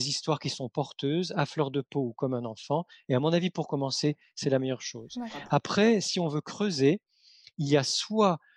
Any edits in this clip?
no; 0 cuts

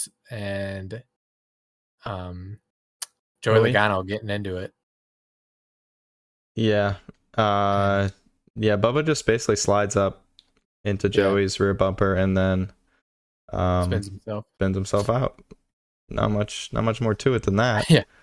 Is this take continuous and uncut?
yes; 0 cuts

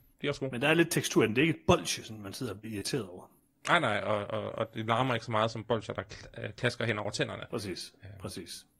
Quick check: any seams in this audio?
no; 0 cuts

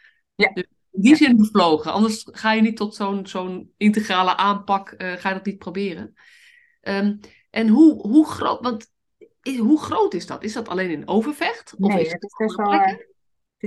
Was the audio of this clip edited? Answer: no; 0 cuts

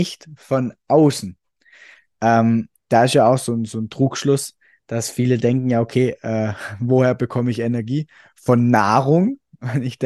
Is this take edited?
no; 0 cuts

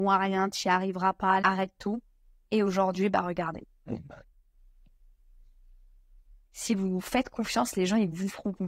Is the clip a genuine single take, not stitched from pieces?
no; 2 cuts; at 1.4 s, 6.5 s

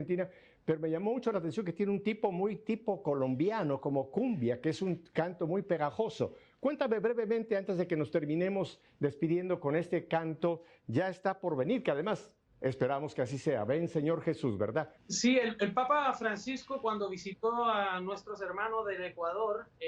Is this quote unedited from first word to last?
no; 1 cut; at 15.0 s

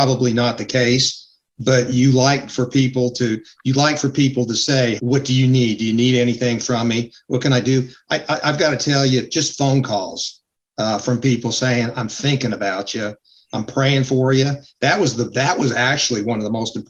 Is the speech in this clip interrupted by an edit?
yes; 1 cut; at 5.0 s

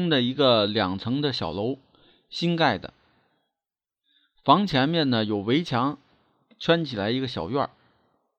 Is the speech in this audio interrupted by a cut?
no; 0 cuts

